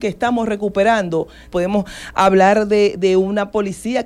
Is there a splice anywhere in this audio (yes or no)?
yes